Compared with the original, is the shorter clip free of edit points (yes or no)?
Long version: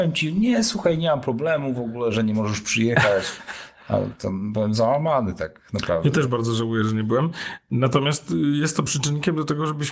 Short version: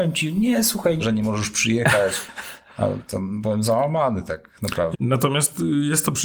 no